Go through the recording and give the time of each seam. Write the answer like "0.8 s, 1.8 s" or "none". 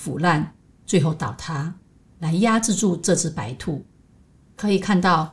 4.4 s